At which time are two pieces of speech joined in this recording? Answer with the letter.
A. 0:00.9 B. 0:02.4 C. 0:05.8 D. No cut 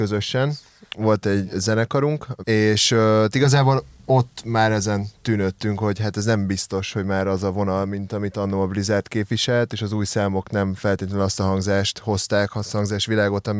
B